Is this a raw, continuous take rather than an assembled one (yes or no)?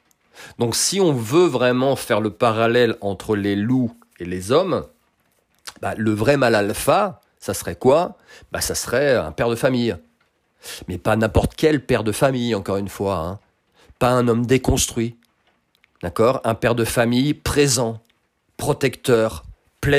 yes